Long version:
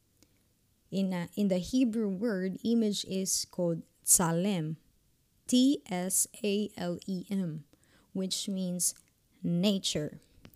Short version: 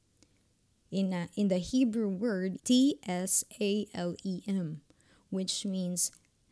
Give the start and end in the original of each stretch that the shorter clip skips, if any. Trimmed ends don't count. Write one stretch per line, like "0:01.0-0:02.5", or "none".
0:02.6-0:05.4